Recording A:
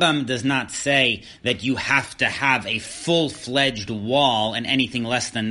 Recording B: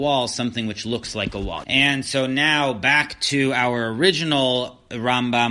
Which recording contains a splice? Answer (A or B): B